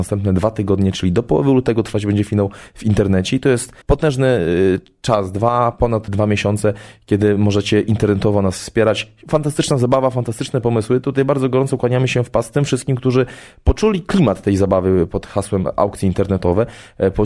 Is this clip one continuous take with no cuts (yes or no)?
no